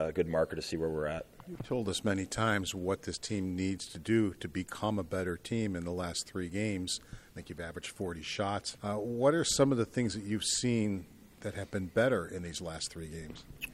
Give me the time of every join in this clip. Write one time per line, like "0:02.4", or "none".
0:08.7